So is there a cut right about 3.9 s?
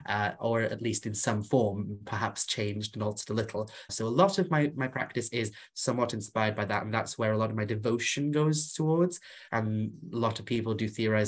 yes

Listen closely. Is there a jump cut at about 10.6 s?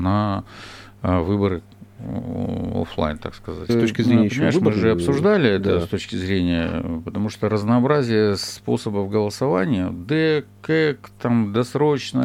no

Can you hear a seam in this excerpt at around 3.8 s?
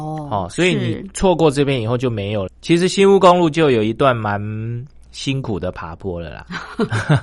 no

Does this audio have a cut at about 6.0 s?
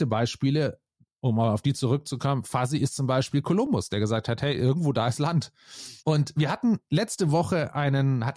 yes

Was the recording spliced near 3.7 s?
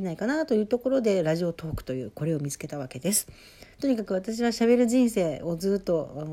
yes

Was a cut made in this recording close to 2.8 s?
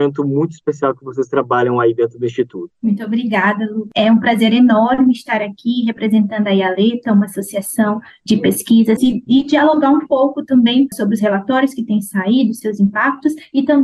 no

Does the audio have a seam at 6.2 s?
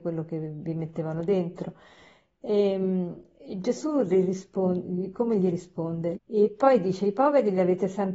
yes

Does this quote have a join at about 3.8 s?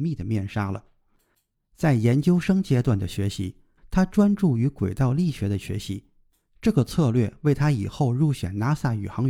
yes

